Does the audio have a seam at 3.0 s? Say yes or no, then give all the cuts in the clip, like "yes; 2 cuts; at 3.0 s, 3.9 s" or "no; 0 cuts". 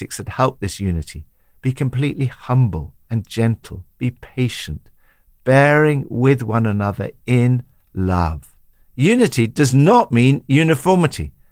yes; 2 cuts; at 3.0 s, 8.8 s